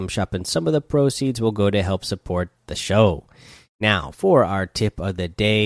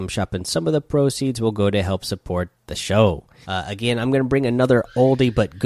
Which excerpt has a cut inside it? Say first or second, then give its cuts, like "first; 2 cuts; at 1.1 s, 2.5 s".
second; 1 cut; at 3.4 s